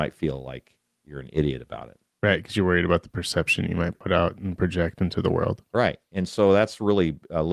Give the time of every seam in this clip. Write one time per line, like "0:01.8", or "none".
none